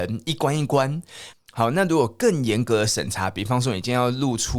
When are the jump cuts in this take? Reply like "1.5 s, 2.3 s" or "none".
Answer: 1.3 s

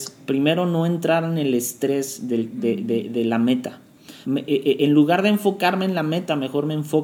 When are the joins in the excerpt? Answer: 4.2 s

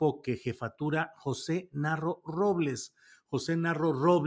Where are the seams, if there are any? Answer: none

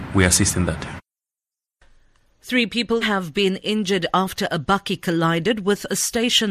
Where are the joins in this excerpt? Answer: 3.0 s

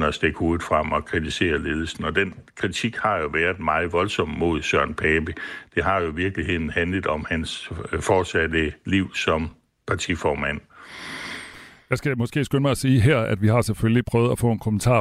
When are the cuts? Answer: none

